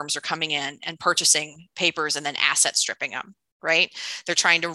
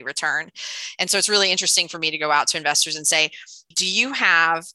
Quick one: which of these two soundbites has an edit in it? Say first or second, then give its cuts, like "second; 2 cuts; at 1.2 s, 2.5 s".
second; 1 cut; at 3.7 s